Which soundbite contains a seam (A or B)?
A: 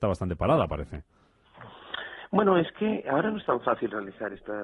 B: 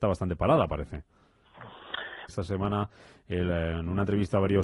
B